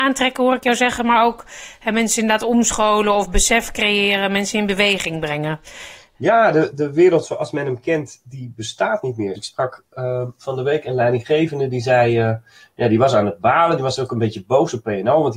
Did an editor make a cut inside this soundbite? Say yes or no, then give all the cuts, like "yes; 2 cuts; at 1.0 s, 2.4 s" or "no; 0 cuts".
yes; 1 cut; at 9.4 s